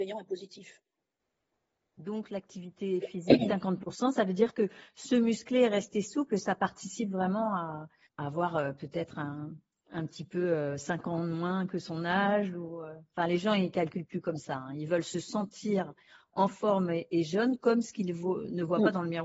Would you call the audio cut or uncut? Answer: uncut